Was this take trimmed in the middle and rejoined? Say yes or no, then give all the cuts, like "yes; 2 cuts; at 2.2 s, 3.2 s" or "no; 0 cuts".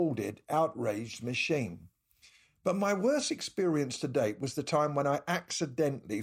no; 0 cuts